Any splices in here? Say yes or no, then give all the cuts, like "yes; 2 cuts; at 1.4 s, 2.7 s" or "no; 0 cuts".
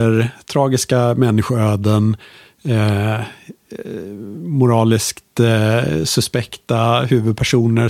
no; 0 cuts